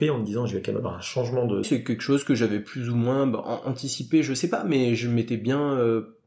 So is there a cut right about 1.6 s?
yes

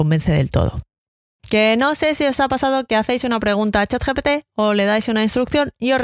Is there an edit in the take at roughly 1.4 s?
yes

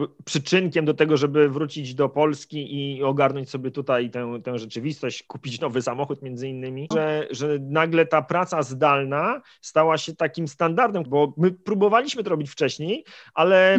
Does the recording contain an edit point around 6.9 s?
yes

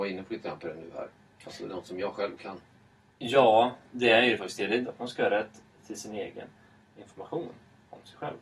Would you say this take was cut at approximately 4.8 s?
yes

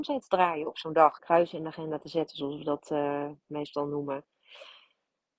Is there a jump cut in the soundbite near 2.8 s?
no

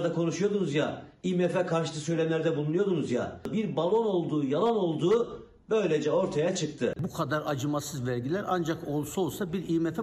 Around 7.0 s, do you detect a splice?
yes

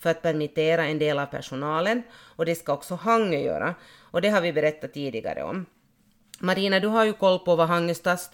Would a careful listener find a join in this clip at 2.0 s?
no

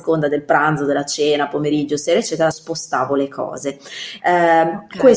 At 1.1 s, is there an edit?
no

